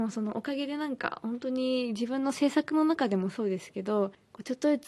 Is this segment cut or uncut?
uncut